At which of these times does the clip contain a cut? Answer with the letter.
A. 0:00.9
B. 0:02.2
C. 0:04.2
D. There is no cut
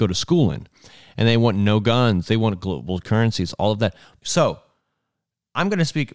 C